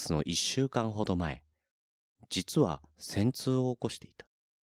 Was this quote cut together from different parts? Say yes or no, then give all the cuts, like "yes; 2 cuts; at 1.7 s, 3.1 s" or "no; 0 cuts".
no; 0 cuts